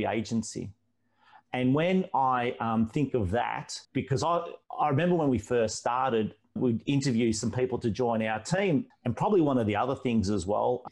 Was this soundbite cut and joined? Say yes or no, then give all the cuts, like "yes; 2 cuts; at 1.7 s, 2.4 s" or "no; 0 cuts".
yes; 2 cuts; at 3.8 s, 8.9 s